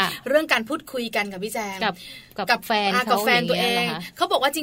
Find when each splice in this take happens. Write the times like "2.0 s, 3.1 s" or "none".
none